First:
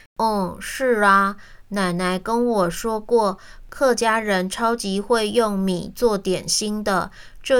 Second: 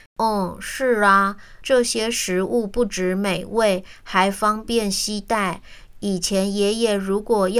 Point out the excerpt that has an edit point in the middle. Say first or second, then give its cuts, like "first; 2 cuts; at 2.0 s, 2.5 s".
second; 1 cut; at 1.6 s